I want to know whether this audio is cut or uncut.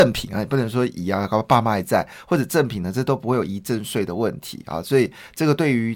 uncut